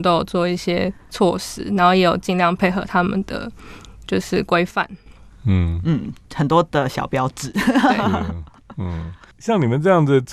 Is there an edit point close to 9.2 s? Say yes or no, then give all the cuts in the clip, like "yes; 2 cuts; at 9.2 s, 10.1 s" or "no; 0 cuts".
no; 0 cuts